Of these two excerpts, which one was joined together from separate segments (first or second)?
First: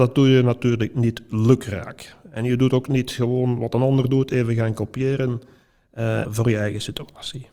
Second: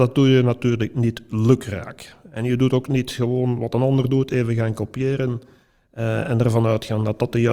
first